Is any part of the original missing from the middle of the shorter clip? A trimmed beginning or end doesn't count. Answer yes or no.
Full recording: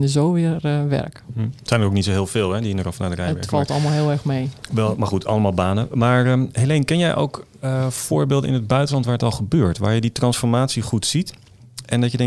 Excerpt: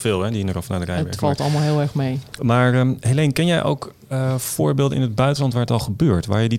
yes